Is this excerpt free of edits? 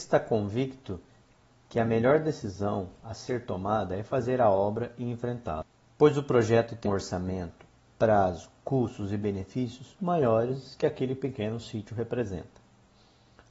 no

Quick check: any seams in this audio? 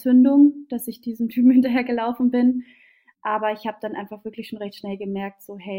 no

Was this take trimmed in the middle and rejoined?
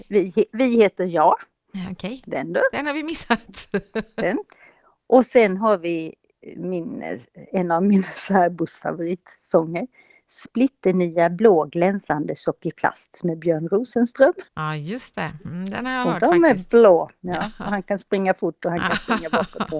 yes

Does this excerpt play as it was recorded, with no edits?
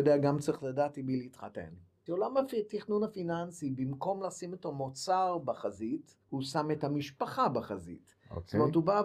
no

